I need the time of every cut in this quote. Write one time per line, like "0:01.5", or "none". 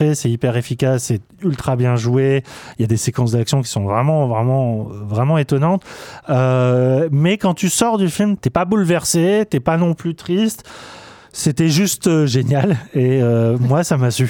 0:08.4

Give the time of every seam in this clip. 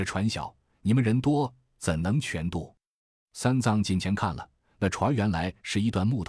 none

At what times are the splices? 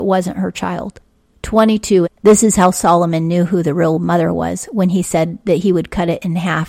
0:02.0

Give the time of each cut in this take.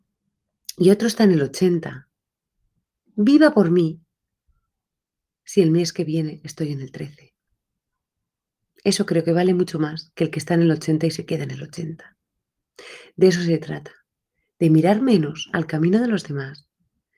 none

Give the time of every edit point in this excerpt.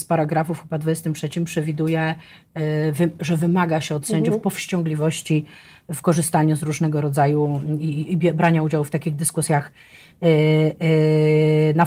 none

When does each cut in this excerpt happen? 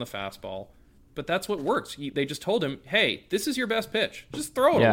none

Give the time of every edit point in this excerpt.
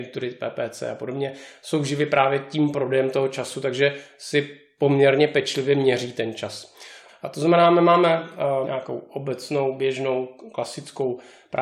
0:07.1
0:08.6

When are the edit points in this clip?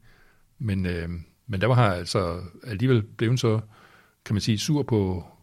none

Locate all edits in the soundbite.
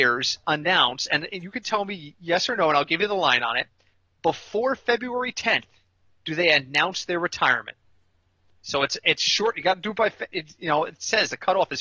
none

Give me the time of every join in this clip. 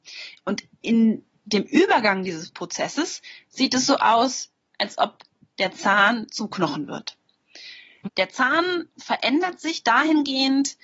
0:08.1

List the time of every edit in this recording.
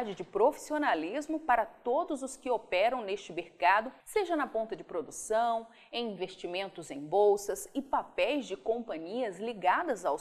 0:04.0

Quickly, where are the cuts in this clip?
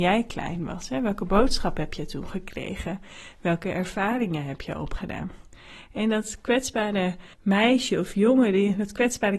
0:07.3

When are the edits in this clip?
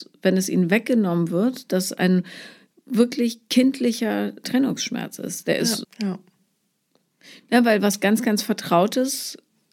0:05.8

